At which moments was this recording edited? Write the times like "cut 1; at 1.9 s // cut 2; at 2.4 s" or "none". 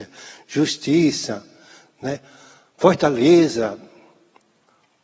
none